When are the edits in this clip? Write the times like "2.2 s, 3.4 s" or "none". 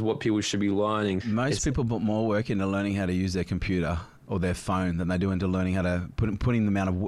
1.2 s, 4.2 s